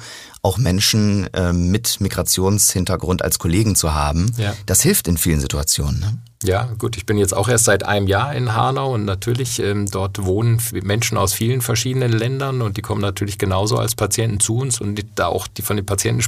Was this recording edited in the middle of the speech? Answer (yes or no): no